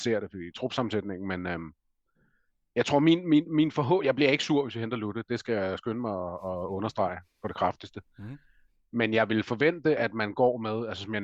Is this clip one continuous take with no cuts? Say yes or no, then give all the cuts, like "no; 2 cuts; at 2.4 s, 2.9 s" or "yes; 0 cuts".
yes; 0 cuts